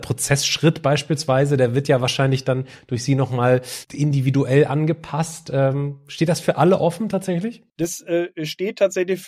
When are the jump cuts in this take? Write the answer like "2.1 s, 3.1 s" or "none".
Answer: 3.8 s, 7.7 s